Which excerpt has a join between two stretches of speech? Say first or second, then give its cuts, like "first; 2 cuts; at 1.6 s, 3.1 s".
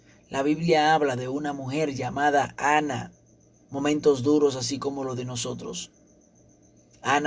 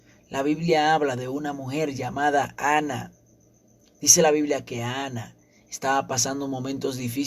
first; 1 cut; at 3.6 s